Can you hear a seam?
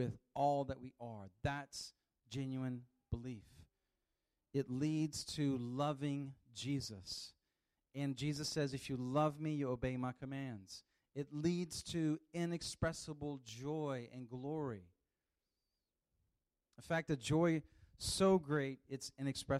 no; 0 cuts

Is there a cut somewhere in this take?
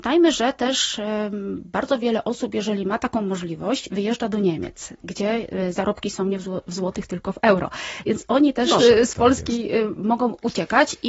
yes; 1 cut; at 8.8 s

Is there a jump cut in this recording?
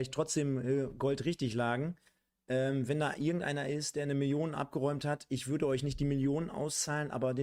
no; 0 cuts

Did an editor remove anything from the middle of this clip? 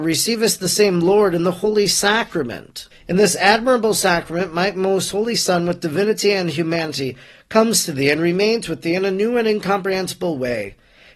no; 0 cuts

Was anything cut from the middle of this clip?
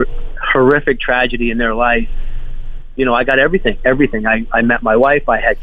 yes; 1 cut; at 3.8 s

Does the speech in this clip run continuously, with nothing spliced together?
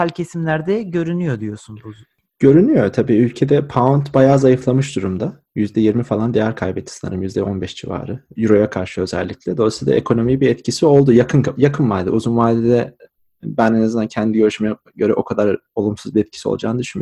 yes; 0 cuts

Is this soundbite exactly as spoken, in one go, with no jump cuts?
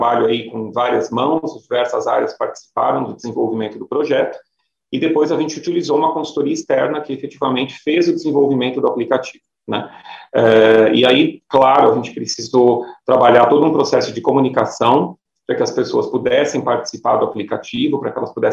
yes; 0 cuts

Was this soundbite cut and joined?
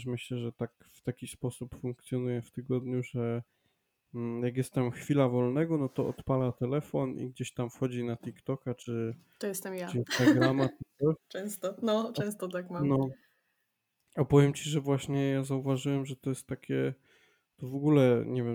no; 0 cuts

